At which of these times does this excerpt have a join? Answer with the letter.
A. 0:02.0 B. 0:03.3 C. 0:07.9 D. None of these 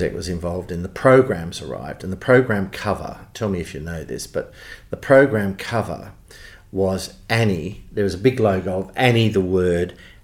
D